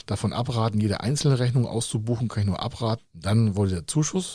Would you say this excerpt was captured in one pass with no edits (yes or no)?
no